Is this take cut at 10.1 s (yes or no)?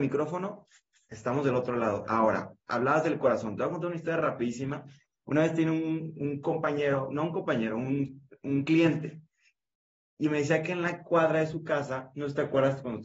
no